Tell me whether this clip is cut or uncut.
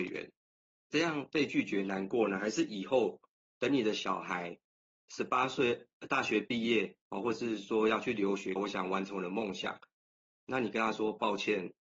cut